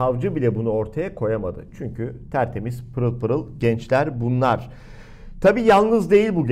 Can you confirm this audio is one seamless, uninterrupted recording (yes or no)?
yes